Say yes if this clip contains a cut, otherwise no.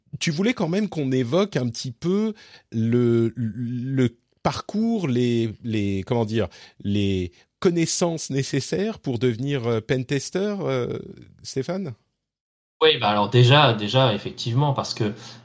no